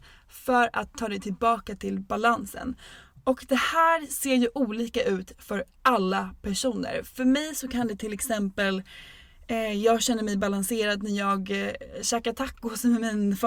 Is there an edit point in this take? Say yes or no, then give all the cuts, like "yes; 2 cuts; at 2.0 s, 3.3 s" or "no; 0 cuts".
no; 0 cuts